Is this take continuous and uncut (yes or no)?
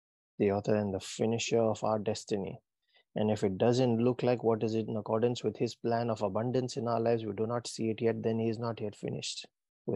yes